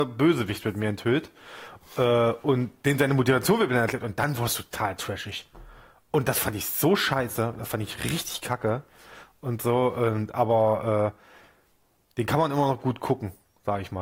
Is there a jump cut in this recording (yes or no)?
no